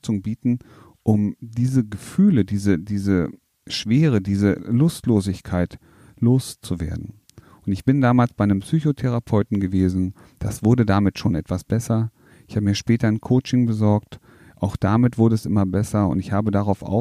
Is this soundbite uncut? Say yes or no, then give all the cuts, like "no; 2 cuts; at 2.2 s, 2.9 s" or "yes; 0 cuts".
yes; 0 cuts